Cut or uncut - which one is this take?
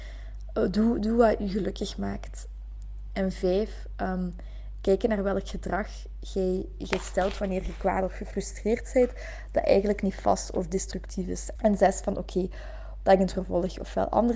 cut